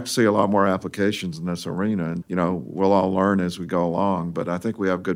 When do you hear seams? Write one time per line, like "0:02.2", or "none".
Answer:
0:02.2